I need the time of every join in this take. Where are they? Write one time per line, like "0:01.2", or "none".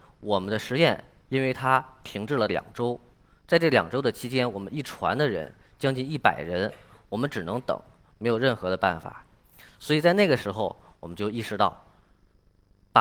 none